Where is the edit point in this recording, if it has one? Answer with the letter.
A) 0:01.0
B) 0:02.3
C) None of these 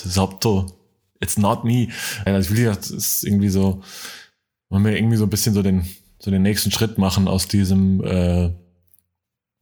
B